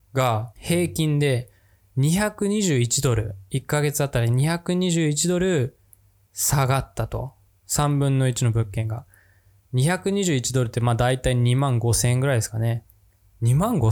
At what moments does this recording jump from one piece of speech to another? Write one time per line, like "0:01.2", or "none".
none